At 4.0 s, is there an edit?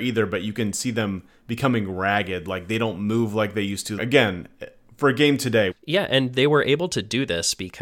yes; 2 cuts; at 4.0 s, 5.7 s

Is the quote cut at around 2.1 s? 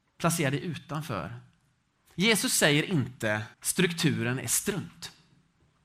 yes; 2 cuts; at 2.1 s, 3.5 s

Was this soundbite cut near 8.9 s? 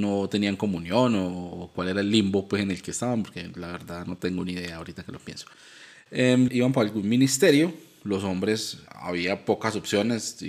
yes; 2 cuts; at 6.5 s, 8.9 s

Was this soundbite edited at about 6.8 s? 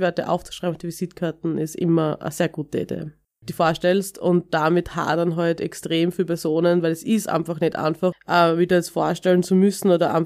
no; 2 cuts; at 3.4 s, 8.1 s

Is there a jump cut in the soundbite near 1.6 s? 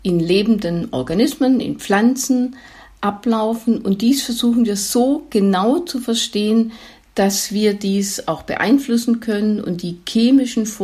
yes; 1 cut; at 1.6 s

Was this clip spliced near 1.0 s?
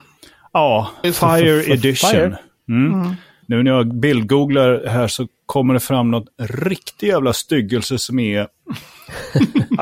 yes; 2 cuts; at 1.0 s, 3.4 s

